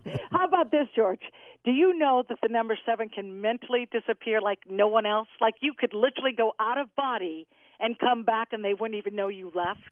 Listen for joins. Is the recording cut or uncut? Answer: uncut